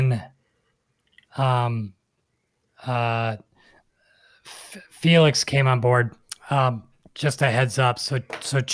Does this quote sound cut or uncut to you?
uncut